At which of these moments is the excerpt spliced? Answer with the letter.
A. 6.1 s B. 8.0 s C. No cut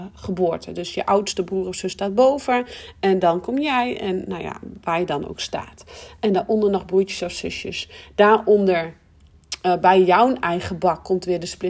C